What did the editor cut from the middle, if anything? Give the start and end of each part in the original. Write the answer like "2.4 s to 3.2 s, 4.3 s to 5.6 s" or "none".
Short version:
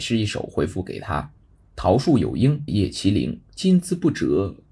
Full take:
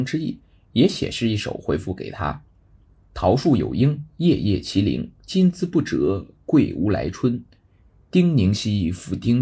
2.5 s to 2.8 s, 4.1 s to 4.4 s